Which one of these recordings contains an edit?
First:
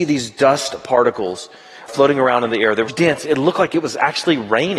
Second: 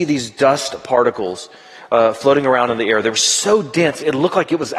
first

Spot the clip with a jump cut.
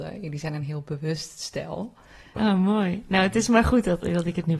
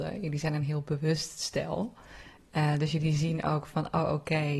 first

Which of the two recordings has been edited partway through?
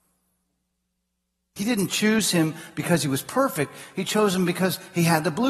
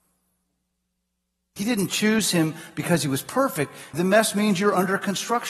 second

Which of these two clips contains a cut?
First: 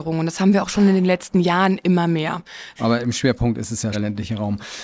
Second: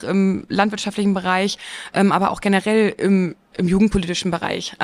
first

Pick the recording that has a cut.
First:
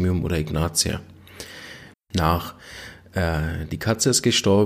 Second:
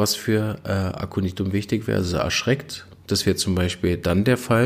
first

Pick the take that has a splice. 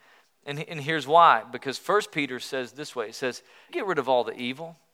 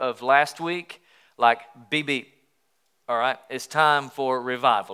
first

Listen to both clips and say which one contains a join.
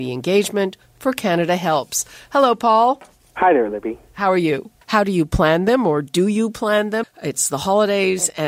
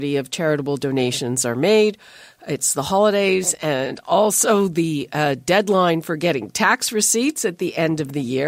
first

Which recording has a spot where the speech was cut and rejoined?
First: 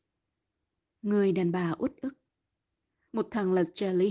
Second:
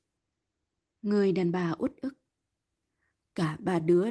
first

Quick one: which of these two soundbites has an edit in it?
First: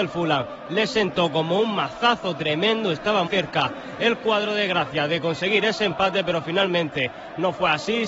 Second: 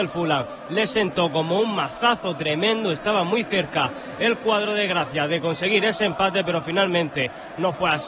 first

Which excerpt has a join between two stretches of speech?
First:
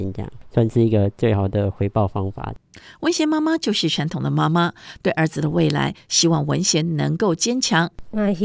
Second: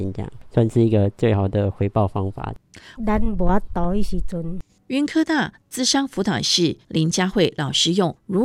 second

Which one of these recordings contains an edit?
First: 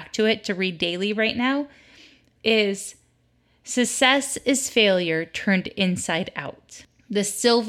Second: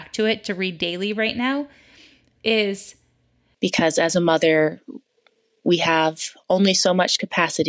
second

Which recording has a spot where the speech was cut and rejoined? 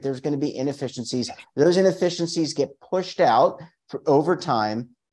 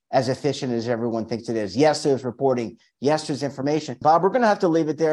second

